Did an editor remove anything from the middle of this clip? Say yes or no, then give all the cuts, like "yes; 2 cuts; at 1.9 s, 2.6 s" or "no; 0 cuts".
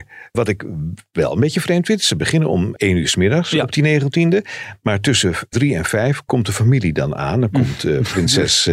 no; 0 cuts